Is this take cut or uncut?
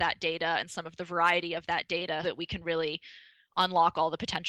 cut